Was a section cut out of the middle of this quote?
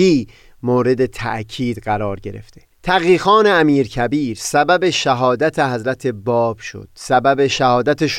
yes; 1 cut; at 2.7 s

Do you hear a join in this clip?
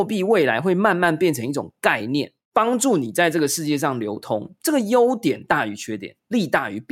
yes; 1 cut; at 2.5 s

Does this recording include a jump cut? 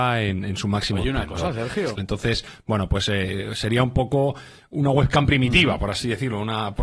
yes; 1 cut; at 2.0 s

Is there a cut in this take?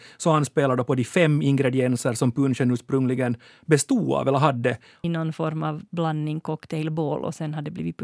yes; 1 cut; at 5.0 s

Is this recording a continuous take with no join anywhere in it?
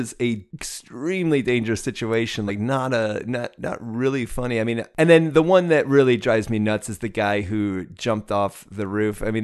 yes; 0 cuts

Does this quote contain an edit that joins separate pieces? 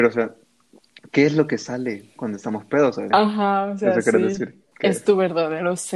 yes; 2 cuts; at 3.1 s, 4.7 s

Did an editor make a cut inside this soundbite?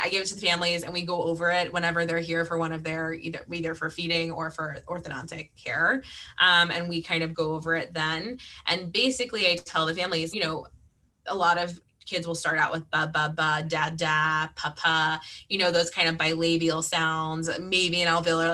yes; 3 cuts; at 10.3 s, 13.6 s, 14.7 s

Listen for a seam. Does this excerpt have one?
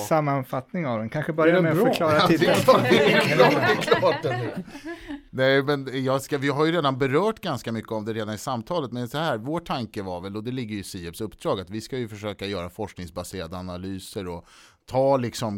no; 0 cuts

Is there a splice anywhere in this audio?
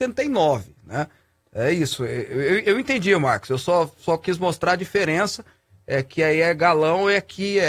no; 0 cuts

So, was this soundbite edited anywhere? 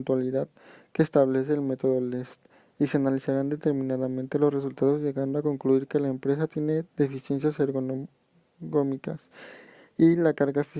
no; 0 cuts

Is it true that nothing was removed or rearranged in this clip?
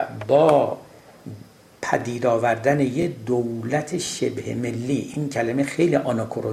yes; 0 cuts

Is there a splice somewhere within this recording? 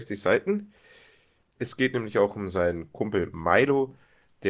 yes; 1 cut; at 1.6 s

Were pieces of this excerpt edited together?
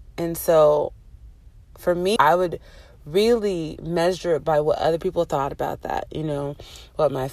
yes; 1 cut; at 2.2 s

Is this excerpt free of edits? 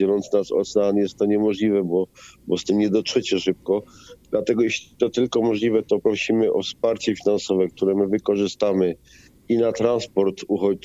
yes; 0 cuts

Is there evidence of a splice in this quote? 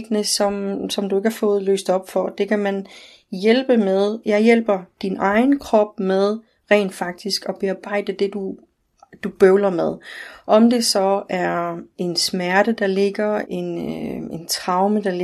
yes; 2 cuts; at 4.2 s, 13.4 s

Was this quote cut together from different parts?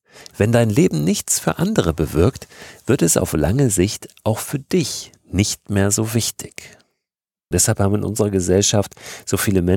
yes; 1 cut; at 7.5 s

